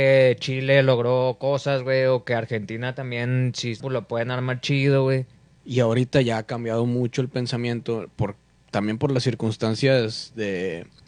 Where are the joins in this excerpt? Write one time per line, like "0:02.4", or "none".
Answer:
0:03.8
0:05.6